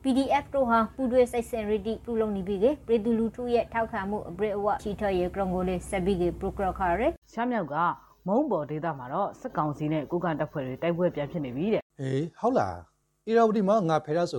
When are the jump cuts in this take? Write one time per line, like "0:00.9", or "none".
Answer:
0:04.8
0:07.2
0:11.9